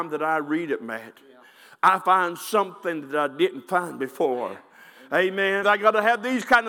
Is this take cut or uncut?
cut